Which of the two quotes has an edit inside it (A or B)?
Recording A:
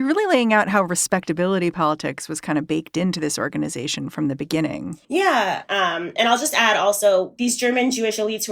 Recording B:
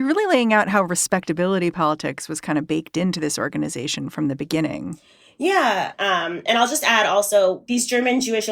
A